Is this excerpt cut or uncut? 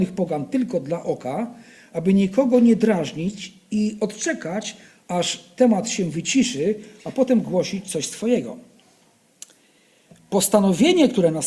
uncut